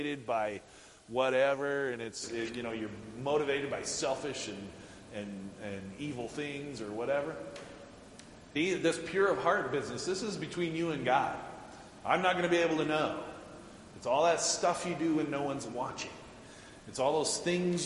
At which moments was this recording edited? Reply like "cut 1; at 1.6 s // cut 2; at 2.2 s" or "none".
none